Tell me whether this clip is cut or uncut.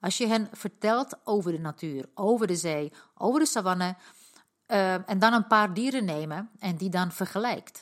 uncut